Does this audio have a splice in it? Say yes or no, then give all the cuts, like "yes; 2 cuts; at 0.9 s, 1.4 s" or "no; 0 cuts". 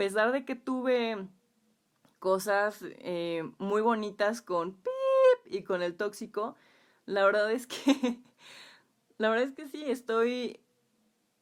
no; 0 cuts